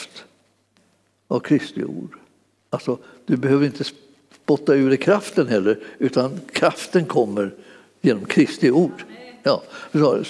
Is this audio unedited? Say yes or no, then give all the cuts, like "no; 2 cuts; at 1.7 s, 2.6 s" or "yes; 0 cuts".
yes; 0 cuts